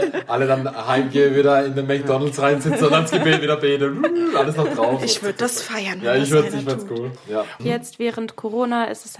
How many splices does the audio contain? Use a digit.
1